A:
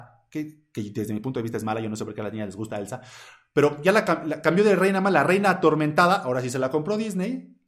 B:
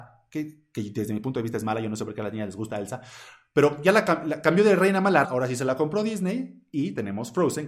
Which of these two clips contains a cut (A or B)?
B